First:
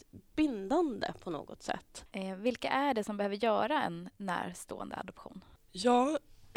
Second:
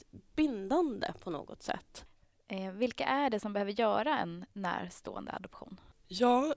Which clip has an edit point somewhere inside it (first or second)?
first